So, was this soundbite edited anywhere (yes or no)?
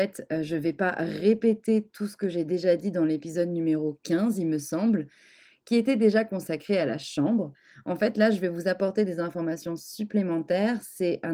no